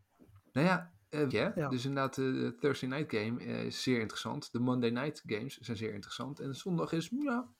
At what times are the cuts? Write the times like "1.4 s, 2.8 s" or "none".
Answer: 1.3 s